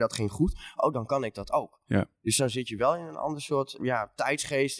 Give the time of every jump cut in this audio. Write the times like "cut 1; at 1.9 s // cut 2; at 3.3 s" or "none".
cut 1; at 3.8 s